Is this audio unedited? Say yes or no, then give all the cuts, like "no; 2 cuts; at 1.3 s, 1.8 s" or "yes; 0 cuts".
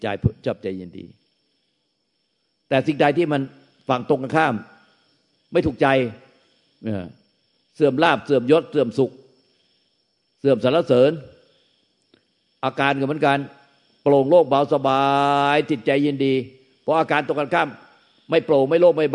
yes; 0 cuts